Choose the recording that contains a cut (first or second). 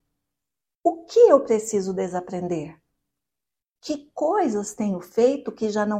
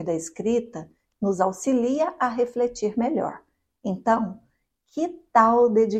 second